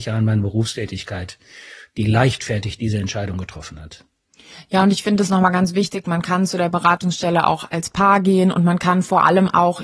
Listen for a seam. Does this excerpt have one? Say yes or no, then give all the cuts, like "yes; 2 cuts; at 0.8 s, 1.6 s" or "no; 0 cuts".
no; 0 cuts